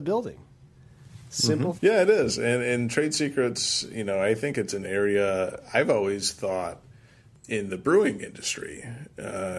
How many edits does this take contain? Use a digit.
1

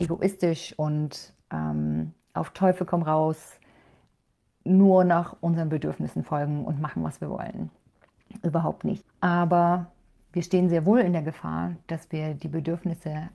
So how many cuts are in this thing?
1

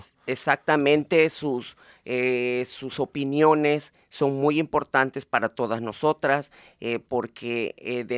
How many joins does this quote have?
0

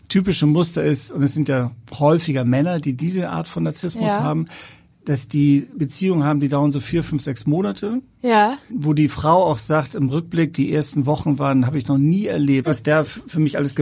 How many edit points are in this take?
2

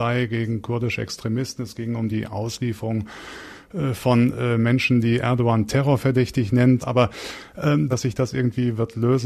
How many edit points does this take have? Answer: 2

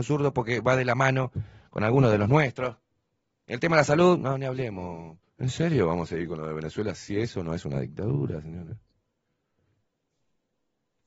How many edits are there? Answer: 1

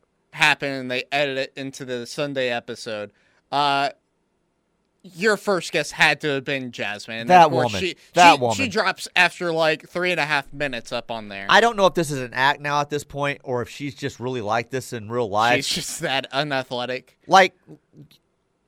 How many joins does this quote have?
0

